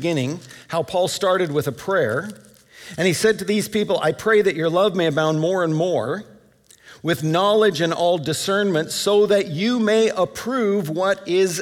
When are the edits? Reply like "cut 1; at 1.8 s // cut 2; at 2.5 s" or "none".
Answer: none